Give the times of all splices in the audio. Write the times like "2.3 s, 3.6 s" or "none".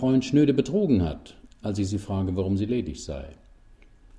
1.6 s